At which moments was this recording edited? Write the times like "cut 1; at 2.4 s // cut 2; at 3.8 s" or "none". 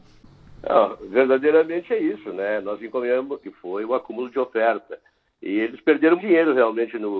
cut 1; at 3.4 s // cut 2; at 6.2 s